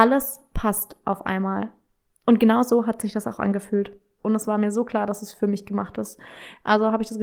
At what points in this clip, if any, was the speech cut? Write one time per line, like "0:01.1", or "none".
0:04.2